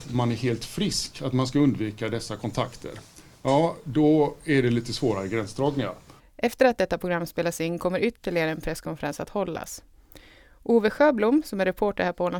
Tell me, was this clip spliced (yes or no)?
yes